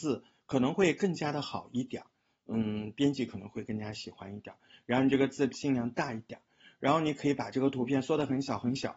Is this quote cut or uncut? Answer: uncut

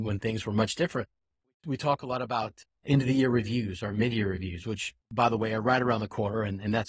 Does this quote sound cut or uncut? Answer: uncut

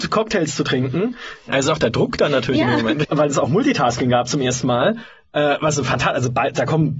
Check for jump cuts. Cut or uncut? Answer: cut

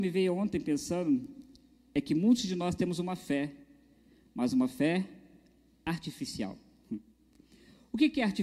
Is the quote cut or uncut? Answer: uncut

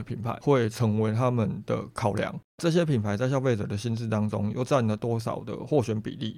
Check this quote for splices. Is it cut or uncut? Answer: uncut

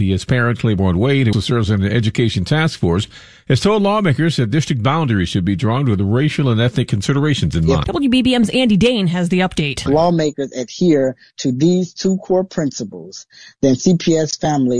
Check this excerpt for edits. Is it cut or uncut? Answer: cut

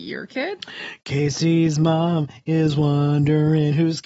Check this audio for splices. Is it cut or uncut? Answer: uncut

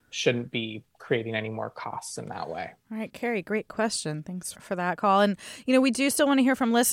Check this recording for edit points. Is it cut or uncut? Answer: cut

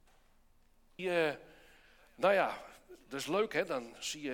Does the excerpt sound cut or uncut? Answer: cut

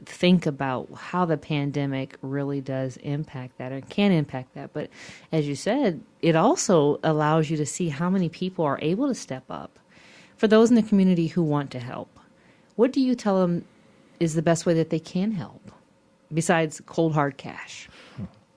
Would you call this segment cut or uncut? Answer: uncut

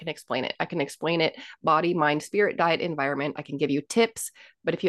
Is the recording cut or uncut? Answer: uncut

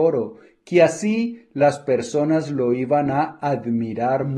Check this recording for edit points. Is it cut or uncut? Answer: uncut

